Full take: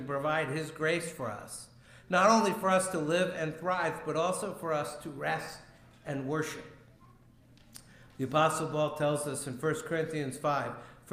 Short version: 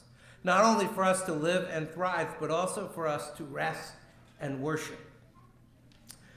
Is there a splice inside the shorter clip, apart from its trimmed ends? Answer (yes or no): no